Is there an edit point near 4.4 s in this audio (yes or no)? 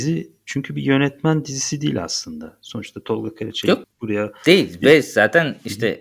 no